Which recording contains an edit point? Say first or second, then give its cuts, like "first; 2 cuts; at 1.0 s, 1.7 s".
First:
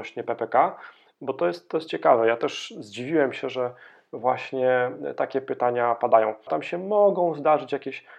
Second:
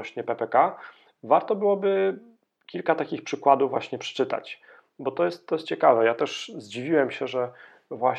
first; 2 cuts; at 1.1 s, 6.5 s